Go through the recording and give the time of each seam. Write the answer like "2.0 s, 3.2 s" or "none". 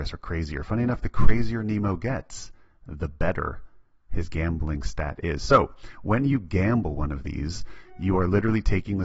none